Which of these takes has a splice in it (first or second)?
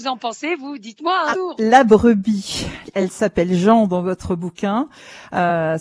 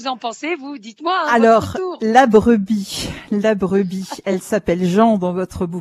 first